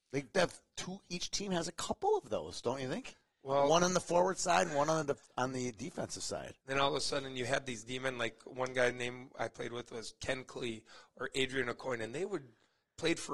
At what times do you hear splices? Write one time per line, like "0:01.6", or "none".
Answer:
0:06.6